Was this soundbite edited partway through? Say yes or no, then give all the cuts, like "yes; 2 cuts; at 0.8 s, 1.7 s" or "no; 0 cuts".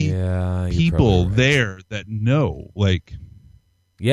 no; 0 cuts